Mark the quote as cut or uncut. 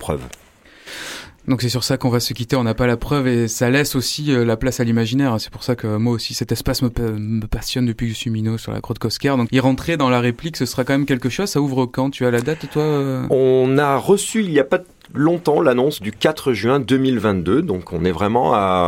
cut